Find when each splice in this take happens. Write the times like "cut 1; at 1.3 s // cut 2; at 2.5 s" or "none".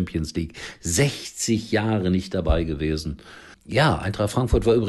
cut 1; at 3.5 s